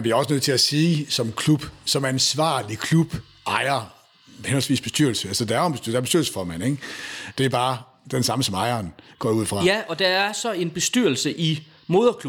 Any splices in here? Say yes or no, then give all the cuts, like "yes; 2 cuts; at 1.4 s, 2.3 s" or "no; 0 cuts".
yes; 1 cut; at 7.4 s